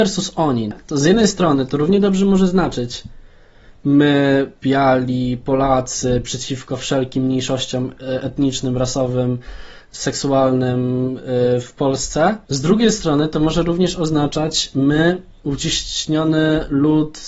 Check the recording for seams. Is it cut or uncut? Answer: cut